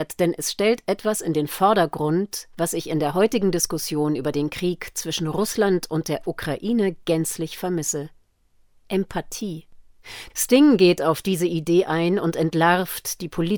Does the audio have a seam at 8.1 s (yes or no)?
no